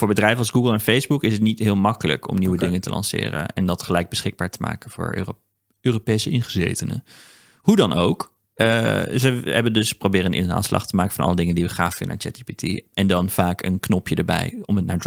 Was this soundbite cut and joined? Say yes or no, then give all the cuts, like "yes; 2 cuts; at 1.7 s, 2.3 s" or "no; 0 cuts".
no; 0 cuts